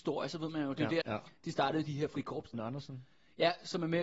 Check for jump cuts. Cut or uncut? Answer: cut